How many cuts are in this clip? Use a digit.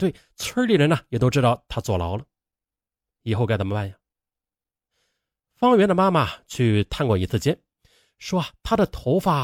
0